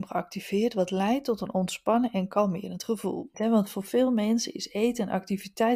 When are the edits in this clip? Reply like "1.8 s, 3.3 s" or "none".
3.3 s